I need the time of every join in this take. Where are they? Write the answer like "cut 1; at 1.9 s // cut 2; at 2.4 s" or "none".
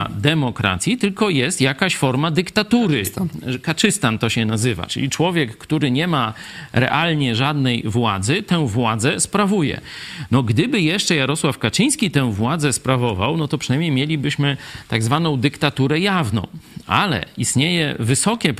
none